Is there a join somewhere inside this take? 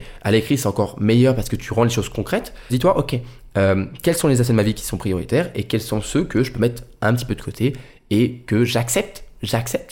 yes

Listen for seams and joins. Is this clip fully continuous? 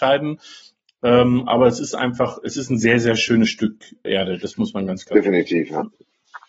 no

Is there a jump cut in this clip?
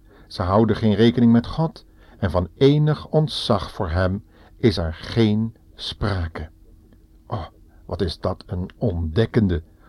no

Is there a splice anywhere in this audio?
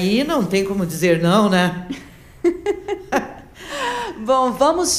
no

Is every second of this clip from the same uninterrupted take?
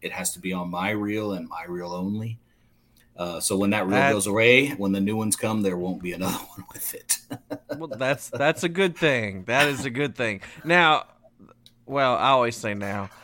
yes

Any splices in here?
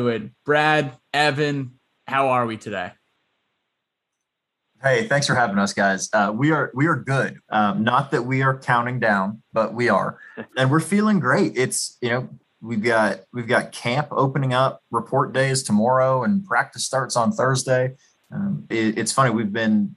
yes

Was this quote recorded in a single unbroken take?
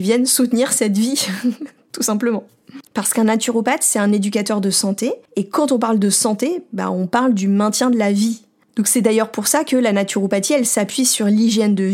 no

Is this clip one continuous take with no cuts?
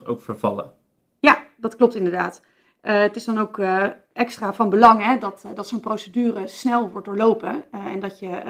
no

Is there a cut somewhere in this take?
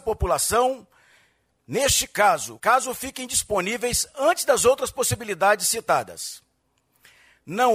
yes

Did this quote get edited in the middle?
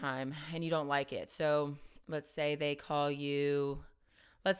yes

